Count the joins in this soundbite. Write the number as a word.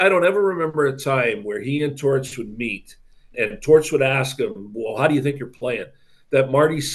one